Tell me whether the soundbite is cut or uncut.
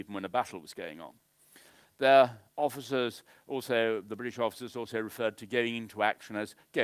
uncut